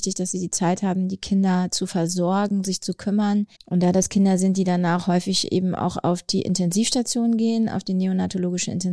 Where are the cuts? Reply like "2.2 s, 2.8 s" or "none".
3.5 s